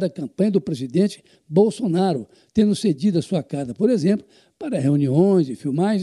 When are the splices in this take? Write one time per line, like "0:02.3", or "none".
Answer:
none

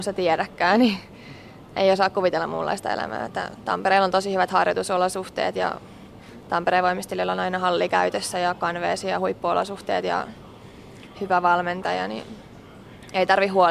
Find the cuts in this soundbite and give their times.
0:03.3

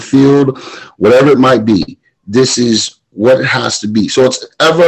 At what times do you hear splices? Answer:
0:00.9

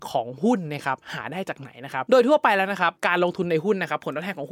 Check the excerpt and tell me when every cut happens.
none

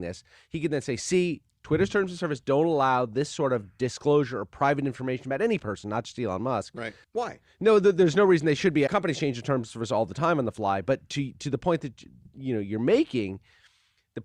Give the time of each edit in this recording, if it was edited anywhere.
0:07.0
0:08.9

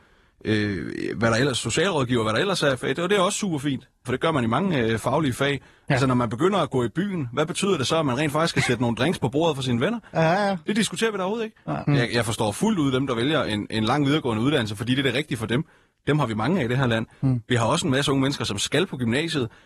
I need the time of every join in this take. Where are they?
0:04.0
0:11.9

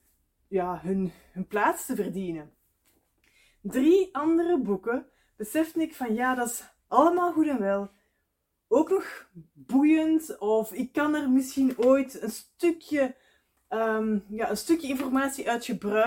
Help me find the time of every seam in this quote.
none

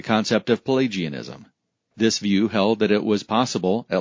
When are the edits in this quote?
none

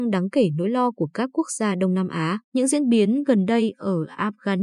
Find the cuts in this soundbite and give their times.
0:02.4

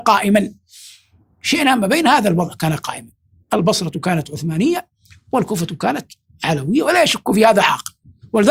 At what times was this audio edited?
none

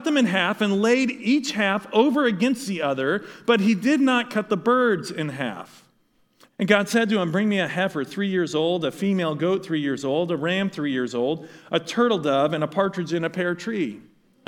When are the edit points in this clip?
0:06.5

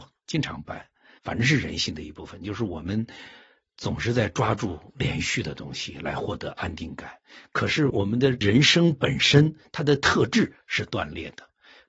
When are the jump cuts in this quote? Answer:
0:01.2

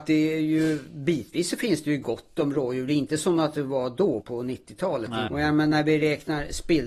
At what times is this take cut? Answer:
0:04.2
0:05.3

